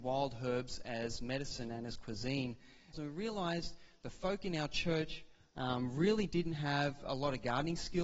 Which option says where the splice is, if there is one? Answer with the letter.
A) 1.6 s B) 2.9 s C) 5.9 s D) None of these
B